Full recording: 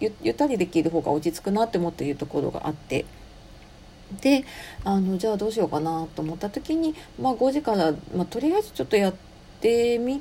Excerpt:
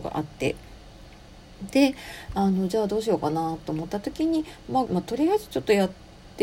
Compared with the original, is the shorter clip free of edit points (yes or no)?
no